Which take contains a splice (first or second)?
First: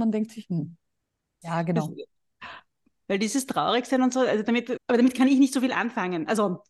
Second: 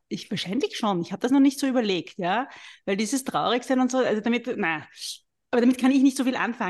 first